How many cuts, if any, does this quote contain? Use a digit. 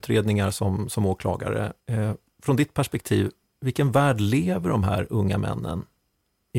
1